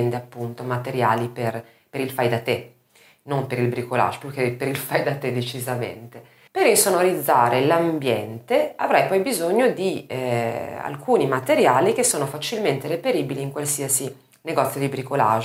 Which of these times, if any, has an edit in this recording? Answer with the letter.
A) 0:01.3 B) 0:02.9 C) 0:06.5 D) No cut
C